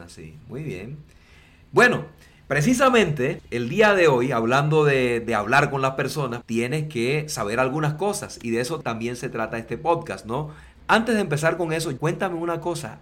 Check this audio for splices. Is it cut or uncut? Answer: cut